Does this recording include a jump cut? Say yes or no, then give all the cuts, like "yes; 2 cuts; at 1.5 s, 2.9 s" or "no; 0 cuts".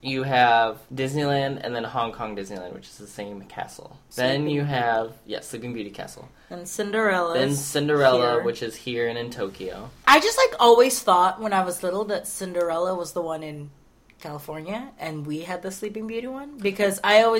no; 0 cuts